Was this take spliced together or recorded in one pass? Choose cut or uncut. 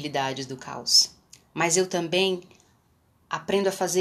uncut